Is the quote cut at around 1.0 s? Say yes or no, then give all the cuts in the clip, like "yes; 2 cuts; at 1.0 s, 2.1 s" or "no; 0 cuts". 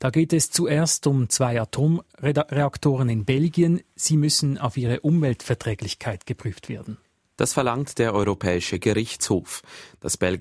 no; 0 cuts